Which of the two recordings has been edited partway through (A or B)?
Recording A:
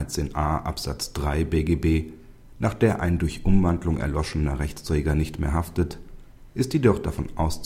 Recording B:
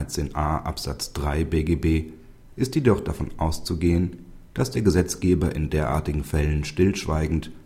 B